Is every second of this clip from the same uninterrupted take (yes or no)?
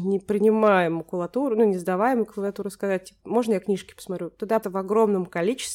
no